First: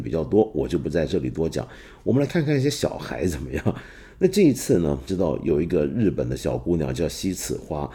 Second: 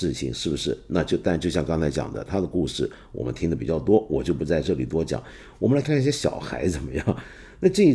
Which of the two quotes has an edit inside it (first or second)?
second